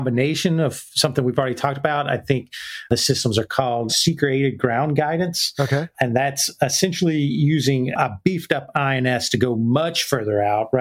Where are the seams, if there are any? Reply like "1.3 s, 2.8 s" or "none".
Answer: 3.9 s